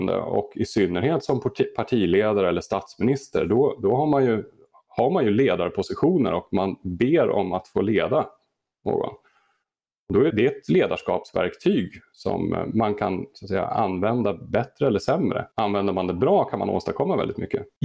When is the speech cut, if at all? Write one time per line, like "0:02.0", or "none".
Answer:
0:10.3
0:15.5